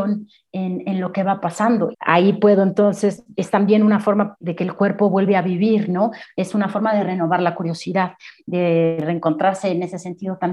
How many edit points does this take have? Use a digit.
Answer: 3